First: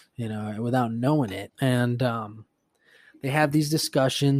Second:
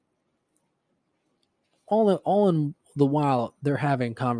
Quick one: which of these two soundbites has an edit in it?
first; 1 cut; at 1.5 s

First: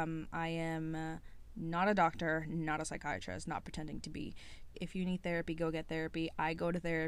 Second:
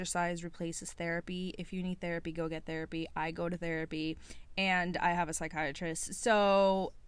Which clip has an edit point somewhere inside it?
first; 1 cut; at 4.7 s

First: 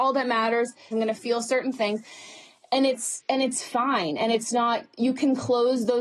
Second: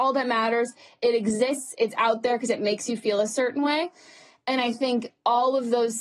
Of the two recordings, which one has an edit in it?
first; 1 cut; at 0.9 s

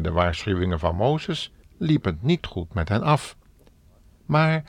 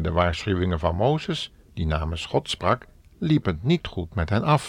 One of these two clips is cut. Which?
first; 1 cut; at 1.6 s

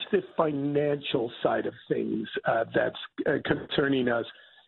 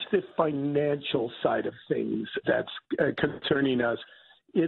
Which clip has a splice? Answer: second; 1 cut; at 2.4 s

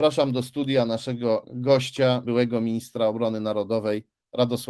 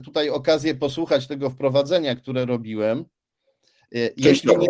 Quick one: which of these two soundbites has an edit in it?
first; 1 cut; at 2.2 s

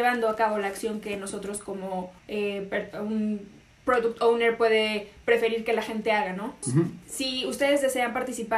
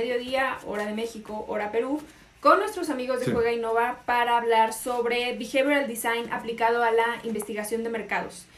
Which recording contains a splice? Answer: first; 2 cuts; at 2.2 s, 6.6 s

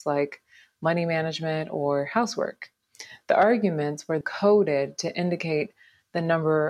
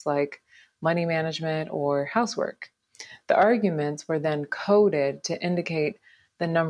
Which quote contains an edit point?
first; 1 cut; at 4.2 s

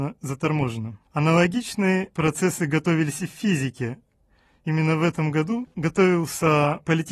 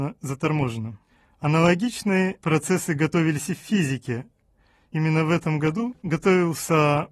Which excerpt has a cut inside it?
first; 1 cut; at 1.1 s

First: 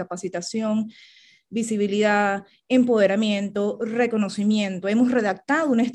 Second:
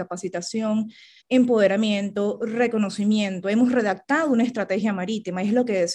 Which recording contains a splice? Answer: second; 1 cut; at 1.2 s

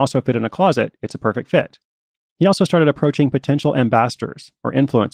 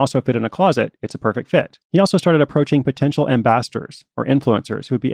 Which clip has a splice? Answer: second; 1 cut; at 1.8 s

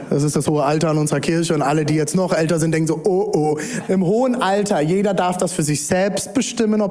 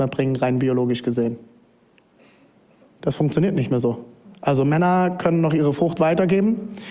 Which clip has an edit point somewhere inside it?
first; 1 cut; at 3.9 s

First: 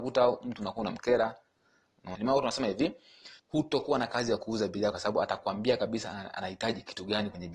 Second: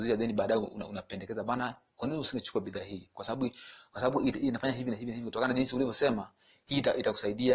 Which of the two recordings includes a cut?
first; 3 cuts; at 2.1 s, 3.4 s, 4.9 s

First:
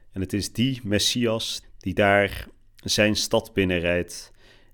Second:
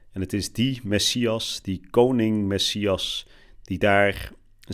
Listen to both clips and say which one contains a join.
first; 1 cut; at 1.6 s

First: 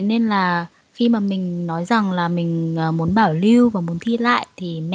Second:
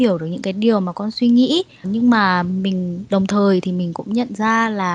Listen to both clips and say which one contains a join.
second; 1 cut; at 1.8 s

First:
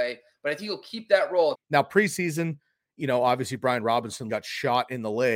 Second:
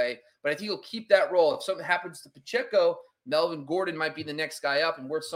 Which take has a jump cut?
first; 2 cuts; at 1.5 s, 4.3 s

